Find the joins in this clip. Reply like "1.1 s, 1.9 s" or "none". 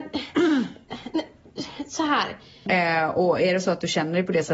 2.7 s